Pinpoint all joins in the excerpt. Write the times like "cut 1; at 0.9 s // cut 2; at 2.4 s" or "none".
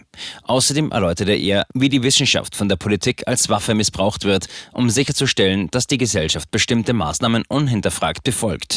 none